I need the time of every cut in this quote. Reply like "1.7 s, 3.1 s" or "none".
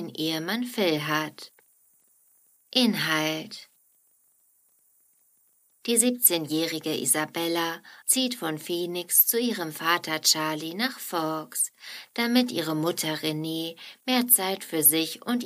2.6 s, 8.0 s